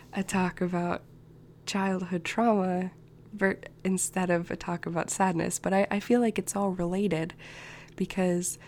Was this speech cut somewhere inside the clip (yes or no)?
no